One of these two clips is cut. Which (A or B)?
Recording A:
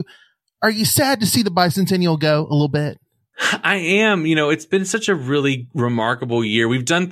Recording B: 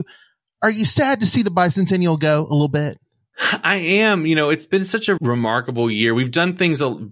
B